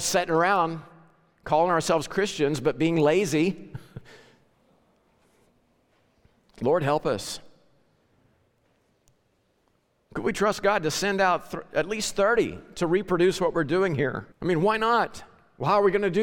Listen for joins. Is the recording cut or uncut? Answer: cut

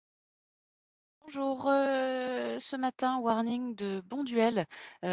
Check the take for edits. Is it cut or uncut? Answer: uncut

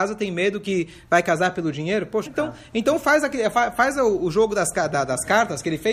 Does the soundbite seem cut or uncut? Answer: cut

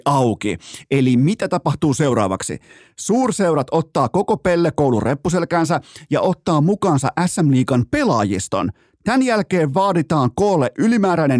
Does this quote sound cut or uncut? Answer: uncut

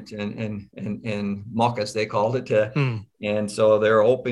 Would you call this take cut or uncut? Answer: uncut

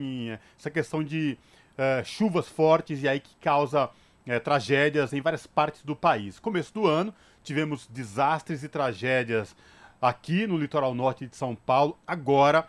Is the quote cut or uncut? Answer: uncut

